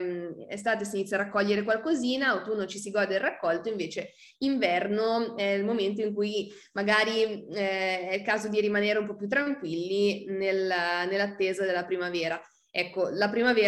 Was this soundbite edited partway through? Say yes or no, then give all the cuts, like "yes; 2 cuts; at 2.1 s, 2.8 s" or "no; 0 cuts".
no; 0 cuts